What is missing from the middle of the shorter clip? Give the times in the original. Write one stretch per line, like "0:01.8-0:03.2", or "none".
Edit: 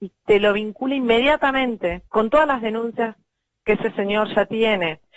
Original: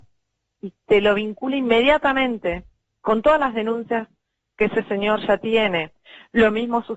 0:02.7-0:03.0